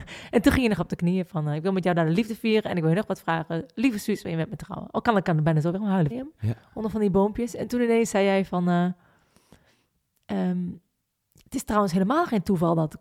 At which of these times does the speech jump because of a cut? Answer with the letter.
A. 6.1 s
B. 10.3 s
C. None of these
A